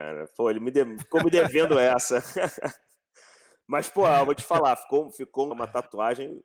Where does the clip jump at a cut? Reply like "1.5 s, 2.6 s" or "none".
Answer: 5.5 s